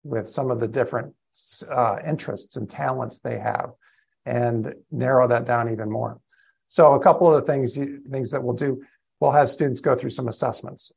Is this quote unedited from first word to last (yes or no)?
no